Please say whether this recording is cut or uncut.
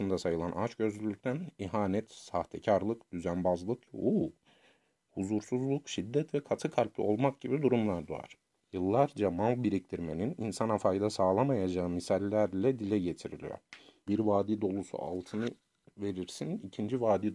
cut